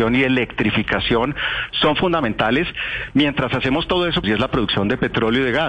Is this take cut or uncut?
cut